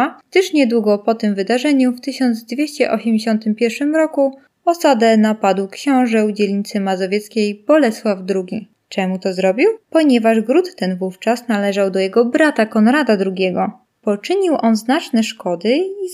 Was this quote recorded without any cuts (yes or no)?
yes